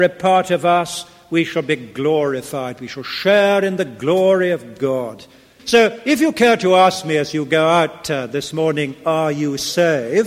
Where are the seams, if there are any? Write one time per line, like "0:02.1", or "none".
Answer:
0:05.6